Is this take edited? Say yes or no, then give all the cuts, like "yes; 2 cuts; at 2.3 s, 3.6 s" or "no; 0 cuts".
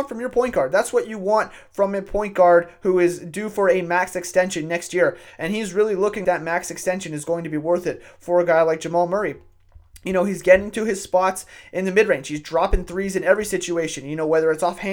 yes; 1 cut; at 6.2 s